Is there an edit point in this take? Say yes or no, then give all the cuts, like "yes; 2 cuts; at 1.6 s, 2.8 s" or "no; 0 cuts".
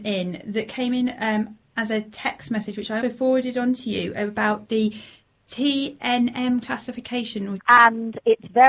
yes; 2 cuts; at 3.0 s, 7.6 s